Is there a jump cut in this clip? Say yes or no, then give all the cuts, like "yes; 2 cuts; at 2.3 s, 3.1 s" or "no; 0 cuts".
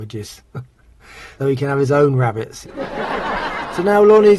yes; 2 cuts; at 1.4 s, 2.6 s